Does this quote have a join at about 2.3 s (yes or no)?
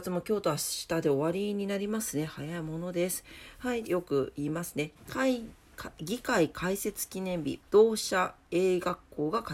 no